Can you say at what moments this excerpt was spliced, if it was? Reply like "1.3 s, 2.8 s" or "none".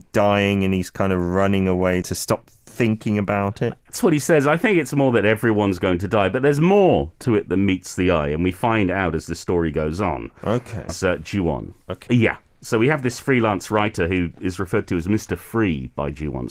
2.0 s, 10.9 s, 12.1 s